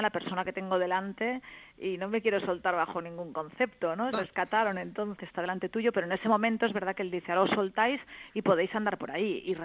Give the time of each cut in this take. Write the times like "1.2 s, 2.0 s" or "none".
4.1 s, 5.2 s